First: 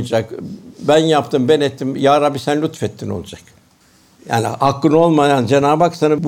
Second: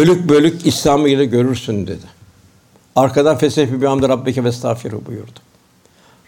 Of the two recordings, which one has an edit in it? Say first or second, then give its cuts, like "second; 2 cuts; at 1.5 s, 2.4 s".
first; 1 cut; at 4.1 s